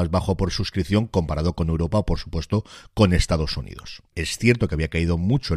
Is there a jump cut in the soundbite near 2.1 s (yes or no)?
no